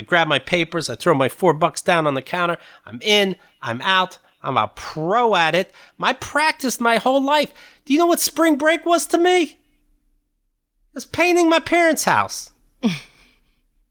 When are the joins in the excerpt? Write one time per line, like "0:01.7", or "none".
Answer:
none